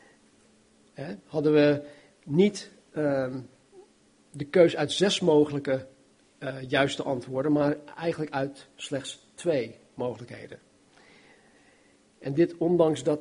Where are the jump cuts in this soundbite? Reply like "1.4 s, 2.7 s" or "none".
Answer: none